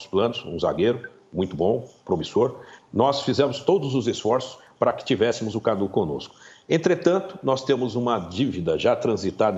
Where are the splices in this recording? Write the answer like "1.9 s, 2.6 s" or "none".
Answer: none